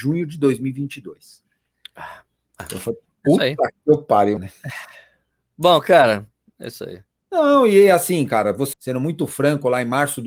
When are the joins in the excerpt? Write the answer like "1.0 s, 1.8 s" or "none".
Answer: 4.4 s, 7.2 s, 8.7 s